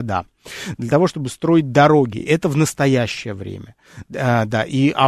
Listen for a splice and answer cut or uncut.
uncut